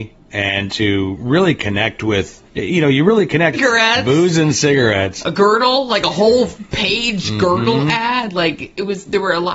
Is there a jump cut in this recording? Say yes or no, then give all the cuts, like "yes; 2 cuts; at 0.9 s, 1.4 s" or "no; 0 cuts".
yes; 2 cuts; at 2.5 s, 3.5 s